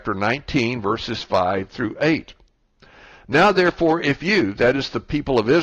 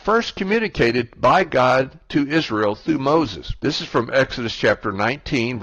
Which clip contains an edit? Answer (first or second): second